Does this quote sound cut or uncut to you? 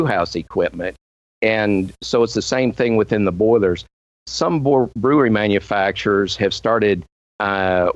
uncut